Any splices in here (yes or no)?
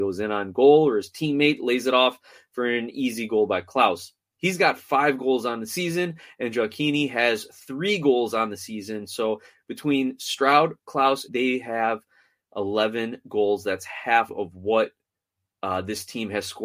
yes